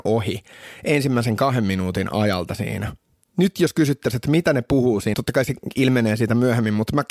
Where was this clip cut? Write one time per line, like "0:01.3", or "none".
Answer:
0:05.1